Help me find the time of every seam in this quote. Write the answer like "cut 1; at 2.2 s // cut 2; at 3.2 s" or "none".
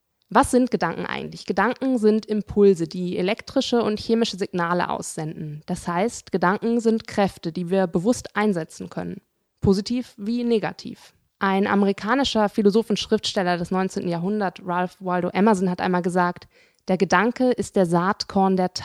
none